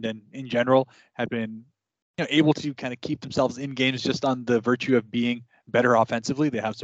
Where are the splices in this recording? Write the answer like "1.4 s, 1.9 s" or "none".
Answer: 1.3 s